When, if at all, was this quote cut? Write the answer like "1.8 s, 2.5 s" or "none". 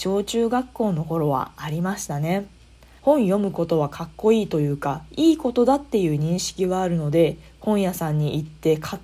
3.0 s